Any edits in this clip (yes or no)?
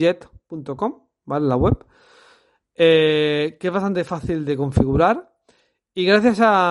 no